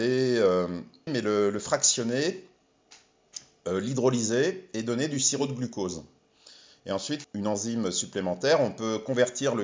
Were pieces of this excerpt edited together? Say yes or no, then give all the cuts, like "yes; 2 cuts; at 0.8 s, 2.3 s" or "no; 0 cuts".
yes; 2 cuts; at 1.1 s, 7.2 s